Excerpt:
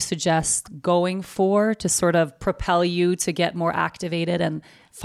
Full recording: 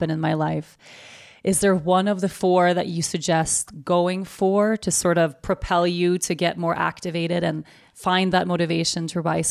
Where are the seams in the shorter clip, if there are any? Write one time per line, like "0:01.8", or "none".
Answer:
none